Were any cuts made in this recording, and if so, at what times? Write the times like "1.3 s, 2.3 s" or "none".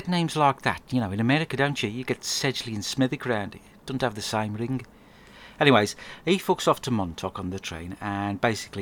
none